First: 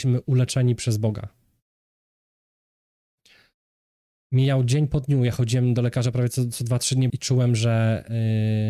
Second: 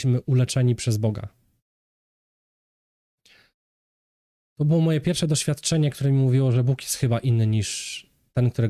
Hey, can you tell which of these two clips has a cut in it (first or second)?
first